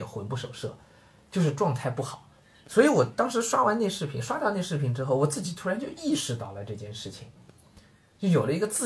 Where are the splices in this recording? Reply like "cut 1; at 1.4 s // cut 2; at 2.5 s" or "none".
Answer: none